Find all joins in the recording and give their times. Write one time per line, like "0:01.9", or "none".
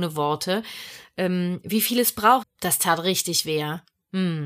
0:02.4